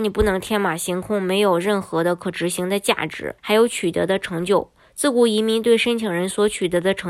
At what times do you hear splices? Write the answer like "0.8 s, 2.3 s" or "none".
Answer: 3.4 s